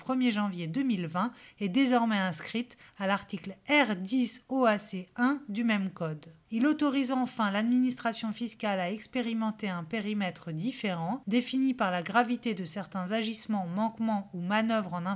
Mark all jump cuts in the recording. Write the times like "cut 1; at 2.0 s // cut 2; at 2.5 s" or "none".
none